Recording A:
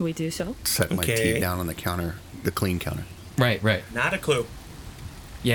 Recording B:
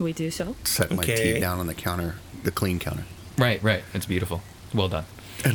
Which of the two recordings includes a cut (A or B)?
A